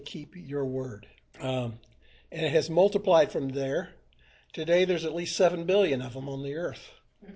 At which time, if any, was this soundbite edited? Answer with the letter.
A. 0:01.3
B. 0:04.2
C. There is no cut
A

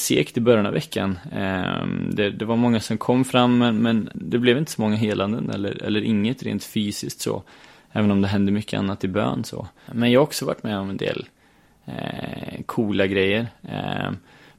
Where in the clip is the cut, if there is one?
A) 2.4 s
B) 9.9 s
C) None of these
B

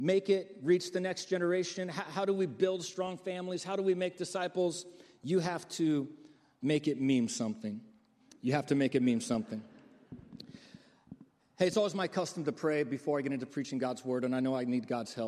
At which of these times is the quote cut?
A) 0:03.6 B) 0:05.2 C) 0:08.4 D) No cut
D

